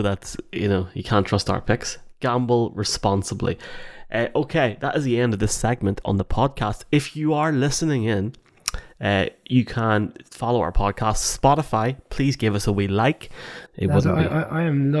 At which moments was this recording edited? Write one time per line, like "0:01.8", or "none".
0:13.7